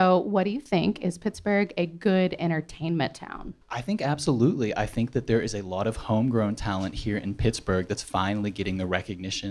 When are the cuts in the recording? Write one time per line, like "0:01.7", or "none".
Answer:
0:03.6